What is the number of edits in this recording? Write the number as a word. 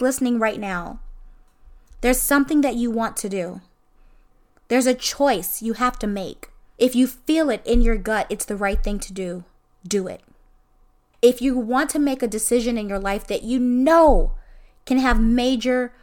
two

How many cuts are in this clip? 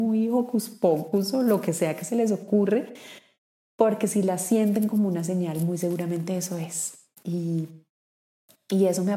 zero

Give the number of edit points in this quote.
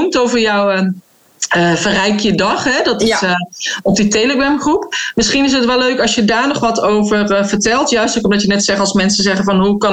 zero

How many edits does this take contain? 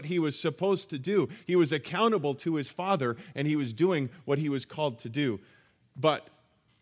zero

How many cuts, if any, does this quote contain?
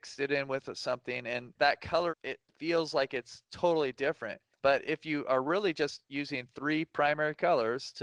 one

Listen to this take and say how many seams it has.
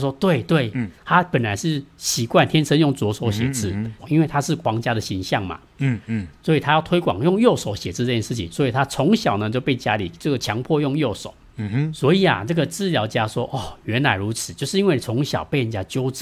one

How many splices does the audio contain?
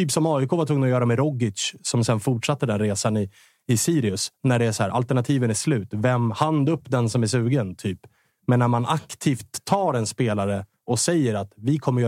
zero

